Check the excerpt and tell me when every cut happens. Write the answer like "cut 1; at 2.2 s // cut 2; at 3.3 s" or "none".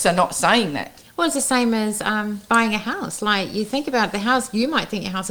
none